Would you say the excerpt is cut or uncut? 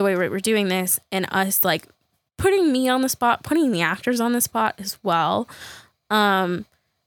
uncut